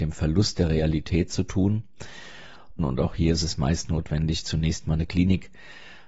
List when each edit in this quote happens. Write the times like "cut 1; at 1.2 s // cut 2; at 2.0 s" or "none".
cut 1; at 2.8 s